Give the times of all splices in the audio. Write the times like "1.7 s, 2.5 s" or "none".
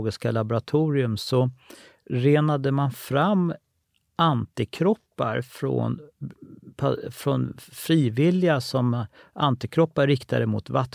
none